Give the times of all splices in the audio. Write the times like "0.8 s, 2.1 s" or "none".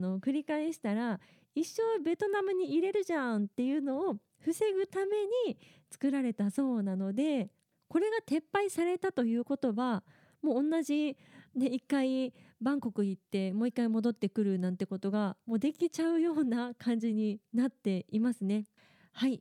none